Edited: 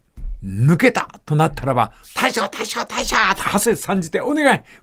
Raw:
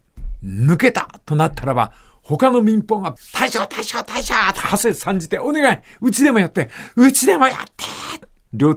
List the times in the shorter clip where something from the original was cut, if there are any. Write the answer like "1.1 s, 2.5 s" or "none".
2.0 s